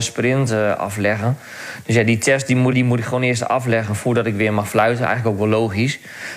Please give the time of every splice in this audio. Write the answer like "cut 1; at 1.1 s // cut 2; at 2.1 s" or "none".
cut 1; at 2.7 s